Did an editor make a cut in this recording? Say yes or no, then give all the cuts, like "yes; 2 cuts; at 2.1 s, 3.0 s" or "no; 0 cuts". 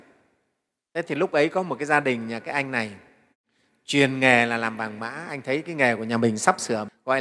no; 0 cuts